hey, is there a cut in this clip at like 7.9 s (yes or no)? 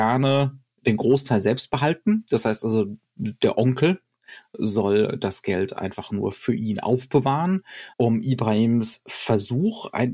yes